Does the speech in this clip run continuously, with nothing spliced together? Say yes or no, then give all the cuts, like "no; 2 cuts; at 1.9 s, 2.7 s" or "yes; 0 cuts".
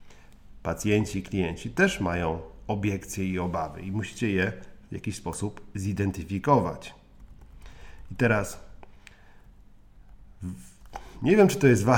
yes; 0 cuts